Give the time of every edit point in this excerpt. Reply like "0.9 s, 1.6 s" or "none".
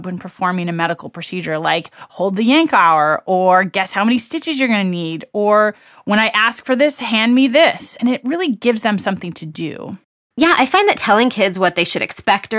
none